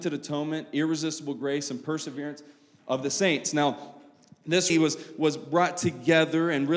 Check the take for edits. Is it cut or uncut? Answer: cut